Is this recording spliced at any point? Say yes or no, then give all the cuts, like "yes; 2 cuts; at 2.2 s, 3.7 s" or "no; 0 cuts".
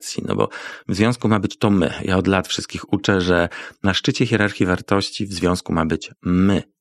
no; 0 cuts